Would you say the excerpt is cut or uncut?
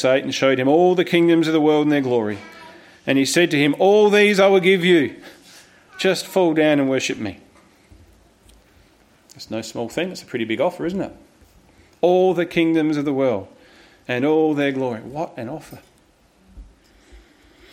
uncut